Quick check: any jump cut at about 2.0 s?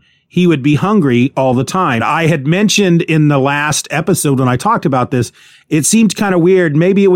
yes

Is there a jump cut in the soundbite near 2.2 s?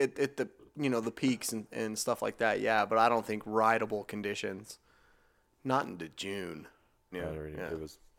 no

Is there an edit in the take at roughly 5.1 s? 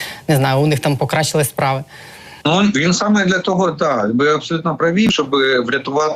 yes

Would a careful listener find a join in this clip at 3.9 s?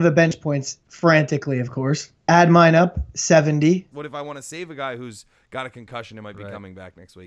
yes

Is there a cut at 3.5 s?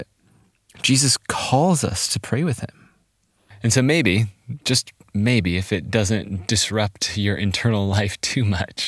yes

